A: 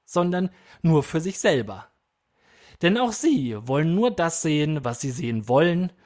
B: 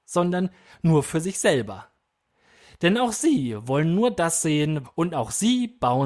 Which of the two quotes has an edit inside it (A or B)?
B